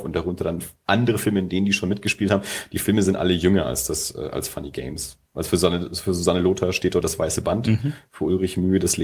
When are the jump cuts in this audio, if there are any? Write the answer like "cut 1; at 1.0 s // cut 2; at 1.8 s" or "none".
cut 1; at 5.3 s // cut 2; at 7.0 s

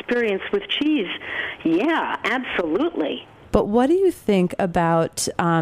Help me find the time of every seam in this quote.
cut 1; at 3.5 s

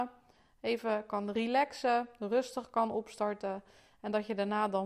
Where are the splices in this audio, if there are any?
none

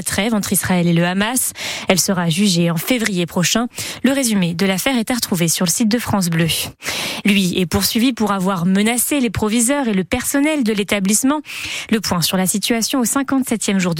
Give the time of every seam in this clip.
cut 1; at 1.9 s // cut 2; at 7.2 s // cut 3; at 11.9 s

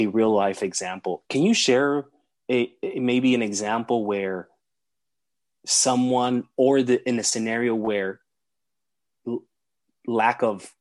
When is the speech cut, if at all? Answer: cut 1; at 1.2 s

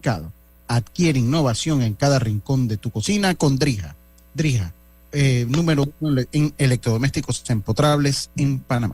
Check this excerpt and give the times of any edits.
none

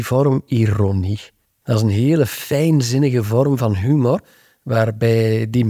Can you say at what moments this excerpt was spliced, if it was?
cut 1; at 1.6 s

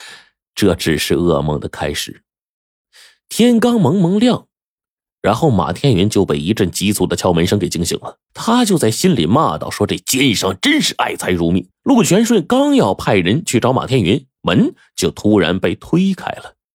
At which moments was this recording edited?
cut 1; at 8.3 s // cut 2; at 11.7 s

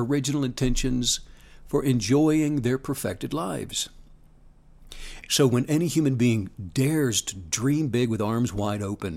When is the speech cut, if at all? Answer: cut 1; at 5.3 s

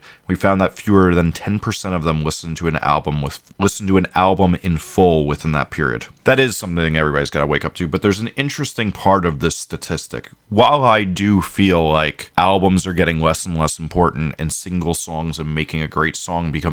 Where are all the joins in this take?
cut 1; at 6.2 s

